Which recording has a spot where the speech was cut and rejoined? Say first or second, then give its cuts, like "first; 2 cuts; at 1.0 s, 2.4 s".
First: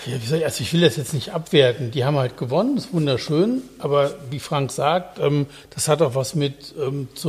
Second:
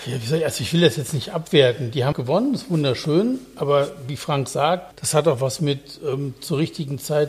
second; 2 cuts; at 2.1 s, 4.9 s